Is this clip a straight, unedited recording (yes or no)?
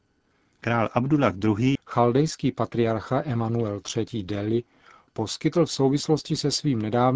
no